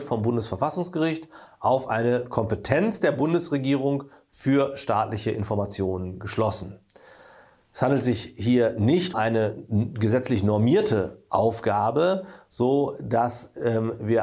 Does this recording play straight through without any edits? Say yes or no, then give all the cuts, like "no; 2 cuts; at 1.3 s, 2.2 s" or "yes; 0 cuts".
no; 1 cut; at 9.1 s